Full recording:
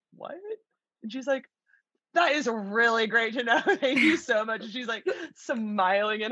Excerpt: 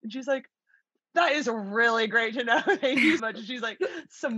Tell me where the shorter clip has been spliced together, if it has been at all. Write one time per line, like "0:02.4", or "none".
0:03.2